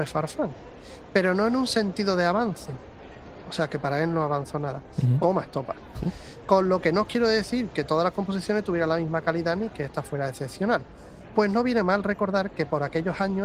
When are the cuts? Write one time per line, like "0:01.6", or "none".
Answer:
0:05.2